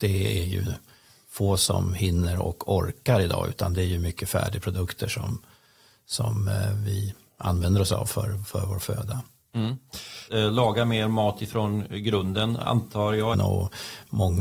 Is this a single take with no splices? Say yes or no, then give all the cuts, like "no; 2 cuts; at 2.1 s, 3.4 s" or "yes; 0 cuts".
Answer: no; 2 cuts; at 10.3 s, 13.3 s